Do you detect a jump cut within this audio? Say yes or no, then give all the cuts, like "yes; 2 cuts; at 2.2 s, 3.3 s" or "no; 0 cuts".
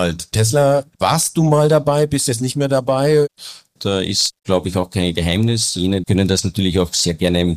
yes; 2 cuts; at 3.8 s, 6.0 s